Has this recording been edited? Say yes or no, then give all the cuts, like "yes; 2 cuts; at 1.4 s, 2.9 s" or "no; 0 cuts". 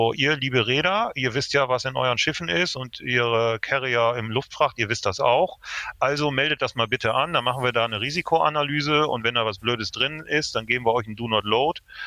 no; 0 cuts